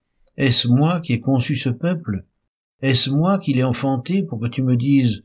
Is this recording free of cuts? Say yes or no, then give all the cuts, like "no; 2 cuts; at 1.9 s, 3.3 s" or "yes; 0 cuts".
yes; 0 cuts